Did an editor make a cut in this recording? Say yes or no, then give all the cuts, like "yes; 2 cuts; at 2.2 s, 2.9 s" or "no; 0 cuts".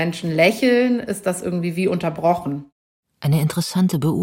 no; 0 cuts